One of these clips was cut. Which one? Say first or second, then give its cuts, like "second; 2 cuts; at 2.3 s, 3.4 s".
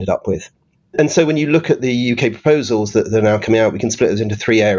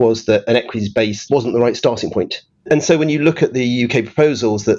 second; 2 cuts; at 1.3 s, 2.6 s